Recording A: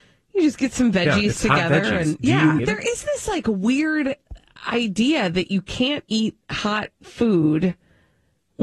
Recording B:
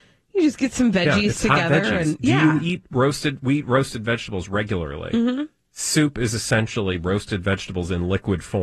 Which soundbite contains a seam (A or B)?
A